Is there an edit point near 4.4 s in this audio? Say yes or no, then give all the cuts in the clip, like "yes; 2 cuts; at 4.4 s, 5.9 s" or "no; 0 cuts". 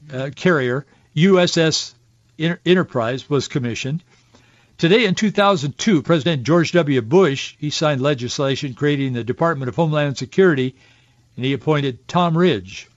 no; 0 cuts